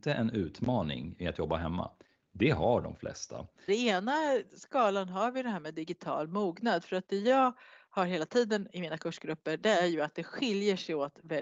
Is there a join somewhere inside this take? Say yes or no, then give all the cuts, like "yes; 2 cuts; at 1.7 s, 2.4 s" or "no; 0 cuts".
yes; 2 cuts; at 2.2 s, 3.7 s